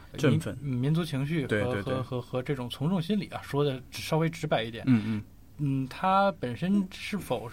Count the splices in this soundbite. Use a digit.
0